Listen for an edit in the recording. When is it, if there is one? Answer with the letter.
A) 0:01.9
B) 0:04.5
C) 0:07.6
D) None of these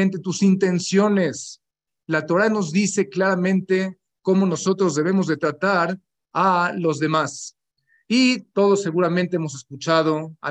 D